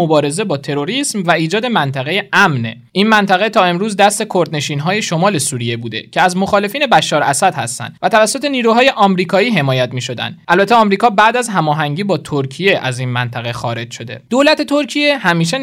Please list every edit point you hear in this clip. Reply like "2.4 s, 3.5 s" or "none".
none